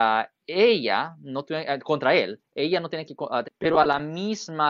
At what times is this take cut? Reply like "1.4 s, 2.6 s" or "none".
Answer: 3.4 s